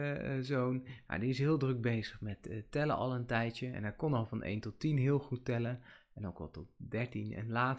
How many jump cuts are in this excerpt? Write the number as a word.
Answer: zero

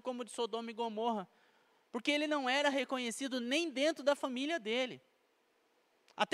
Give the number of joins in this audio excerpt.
zero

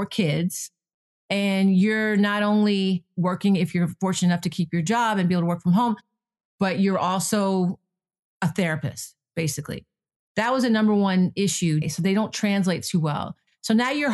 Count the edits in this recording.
one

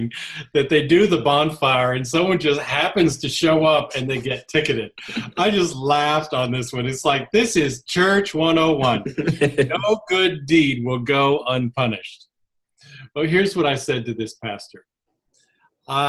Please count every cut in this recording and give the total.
zero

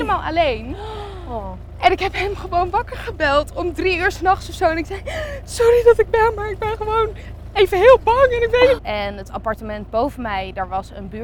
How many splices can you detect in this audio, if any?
one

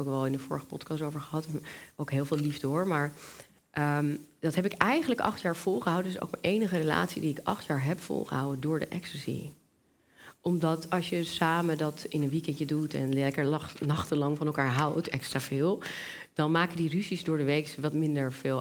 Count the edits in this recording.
zero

